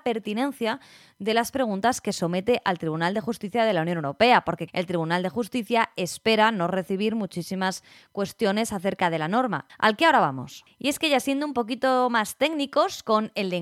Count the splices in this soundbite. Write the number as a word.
two